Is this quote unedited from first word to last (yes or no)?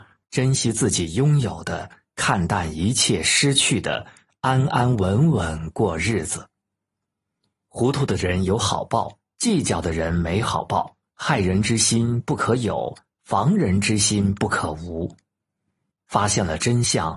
no